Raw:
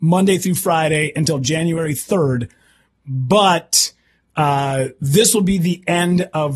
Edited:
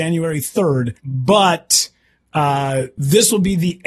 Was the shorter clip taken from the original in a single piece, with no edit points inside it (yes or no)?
no